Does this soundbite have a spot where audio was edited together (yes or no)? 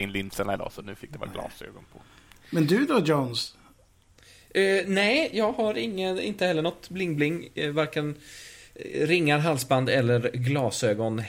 no